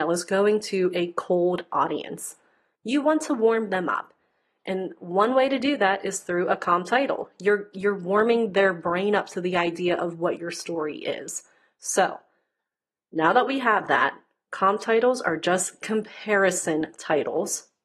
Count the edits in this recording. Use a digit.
1